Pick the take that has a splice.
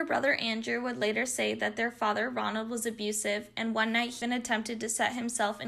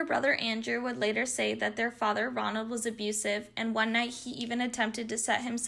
first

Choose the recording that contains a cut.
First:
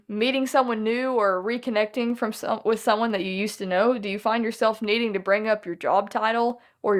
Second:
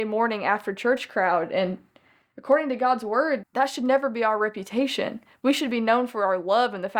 second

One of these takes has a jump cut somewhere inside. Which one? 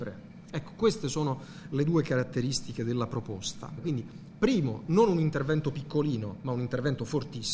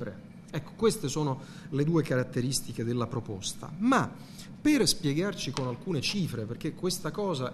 first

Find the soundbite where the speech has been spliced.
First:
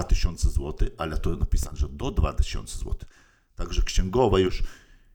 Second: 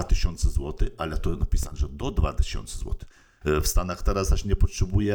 second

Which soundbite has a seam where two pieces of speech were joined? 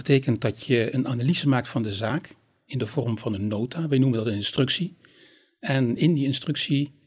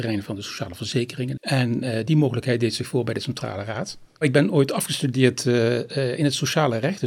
second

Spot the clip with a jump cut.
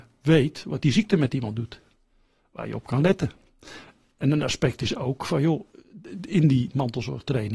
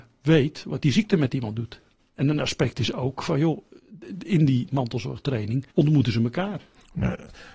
second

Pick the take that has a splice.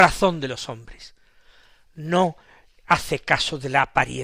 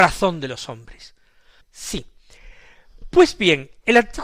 second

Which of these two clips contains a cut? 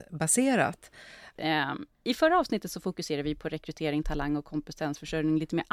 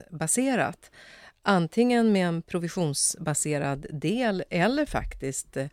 first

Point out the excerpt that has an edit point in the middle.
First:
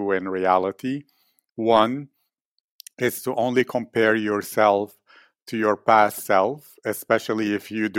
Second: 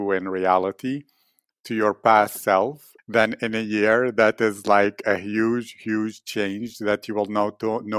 second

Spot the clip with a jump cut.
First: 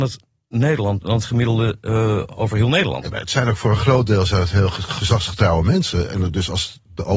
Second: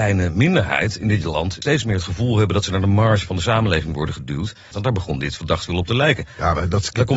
second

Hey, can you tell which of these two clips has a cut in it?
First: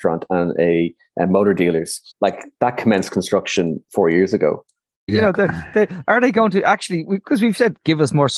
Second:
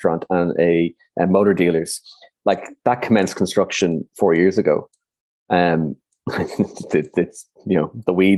first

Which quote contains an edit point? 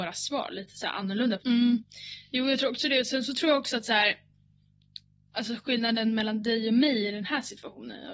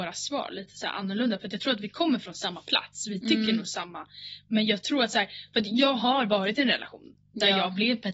first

